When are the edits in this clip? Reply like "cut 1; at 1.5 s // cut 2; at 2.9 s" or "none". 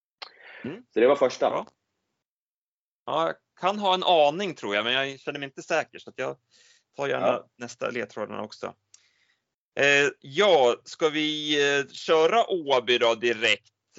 none